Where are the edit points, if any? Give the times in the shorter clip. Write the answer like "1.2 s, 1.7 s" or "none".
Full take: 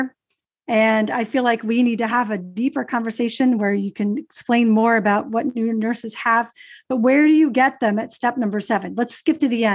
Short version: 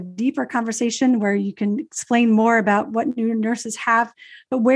none